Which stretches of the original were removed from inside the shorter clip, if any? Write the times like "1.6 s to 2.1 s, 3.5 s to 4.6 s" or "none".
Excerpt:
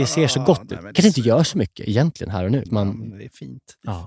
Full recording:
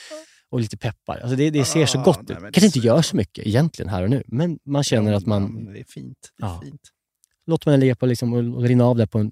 4.2 s to 5.2 s